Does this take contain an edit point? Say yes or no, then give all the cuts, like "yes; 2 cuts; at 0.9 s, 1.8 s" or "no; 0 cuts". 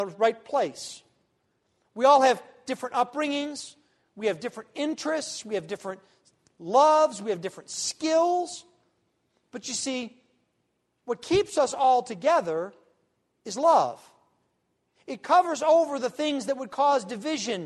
no; 0 cuts